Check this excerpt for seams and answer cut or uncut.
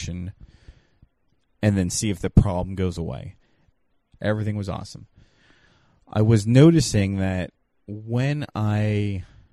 cut